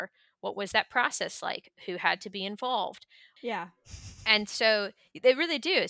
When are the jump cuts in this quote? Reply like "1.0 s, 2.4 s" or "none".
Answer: 3.4 s